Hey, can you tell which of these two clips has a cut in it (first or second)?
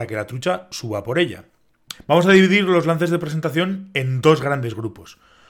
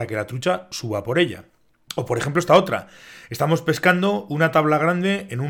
first